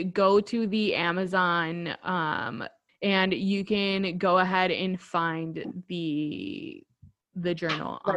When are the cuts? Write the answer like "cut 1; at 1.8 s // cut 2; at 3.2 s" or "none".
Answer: cut 1; at 2.9 s

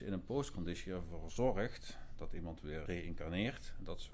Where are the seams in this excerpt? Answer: cut 1; at 2.9 s

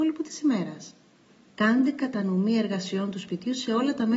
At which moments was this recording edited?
cut 1; at 1.5 s

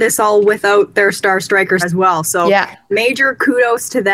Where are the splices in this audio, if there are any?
cut 1; at 1.8 s

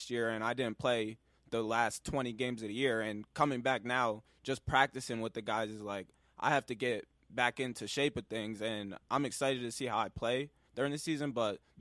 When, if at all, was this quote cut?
none

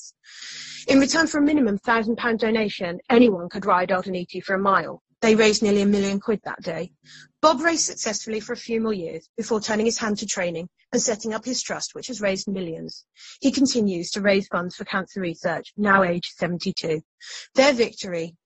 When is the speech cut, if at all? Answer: none

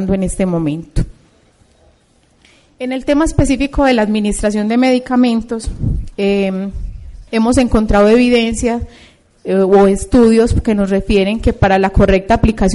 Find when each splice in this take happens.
cut 1; at 7.3 s

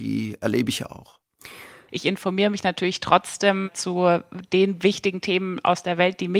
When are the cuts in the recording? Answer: cut 1; at 1.9 s

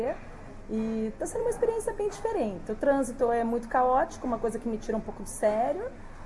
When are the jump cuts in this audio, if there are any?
none

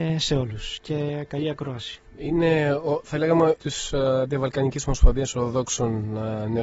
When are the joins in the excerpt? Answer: cut 1; at 2.0 s // cut 2; at 3.6 s

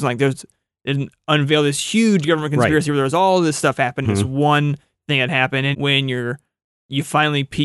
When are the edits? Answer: cut 1; at 4.0 s // cut 2; at 5.7 s

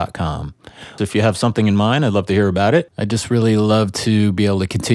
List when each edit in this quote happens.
cut 1; at 1.0 s // cut 2; at 2.9 s

